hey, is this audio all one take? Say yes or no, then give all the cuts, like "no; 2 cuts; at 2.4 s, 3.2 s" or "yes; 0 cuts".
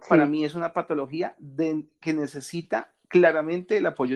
yes; 0 cuts